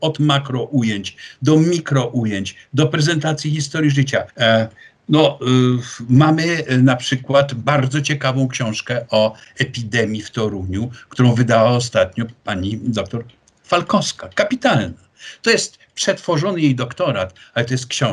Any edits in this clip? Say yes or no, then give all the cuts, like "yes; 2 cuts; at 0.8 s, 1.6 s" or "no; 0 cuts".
yes; 1 cut; at 4.3 s